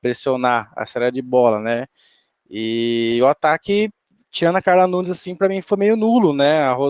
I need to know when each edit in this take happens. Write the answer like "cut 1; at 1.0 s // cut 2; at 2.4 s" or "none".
none